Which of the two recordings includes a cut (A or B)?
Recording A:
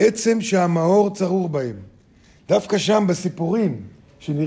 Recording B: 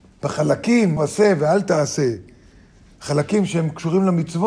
B